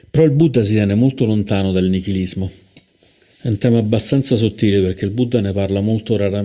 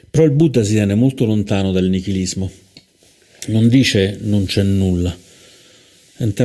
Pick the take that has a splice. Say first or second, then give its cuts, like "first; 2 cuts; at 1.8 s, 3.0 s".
first; 1 cut; at 3.3 s